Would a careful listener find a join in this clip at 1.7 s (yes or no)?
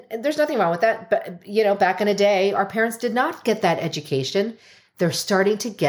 no